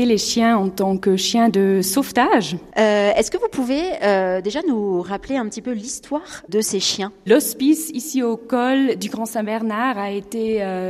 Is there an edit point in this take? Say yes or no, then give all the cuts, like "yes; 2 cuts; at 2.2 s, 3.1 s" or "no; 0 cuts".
yes; 1 cut; at 2.7 s